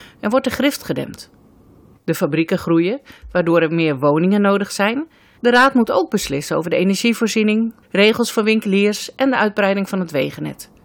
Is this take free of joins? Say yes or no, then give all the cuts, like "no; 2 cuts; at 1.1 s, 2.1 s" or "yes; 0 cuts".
no; 3 cuts; at 2.0 s, 5.3 s, 7.8 s